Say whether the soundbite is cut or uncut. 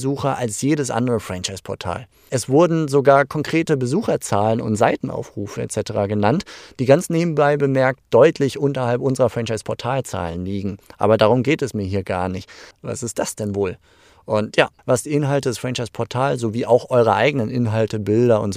cut